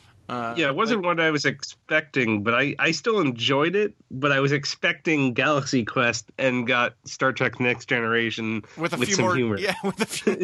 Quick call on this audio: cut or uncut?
uncut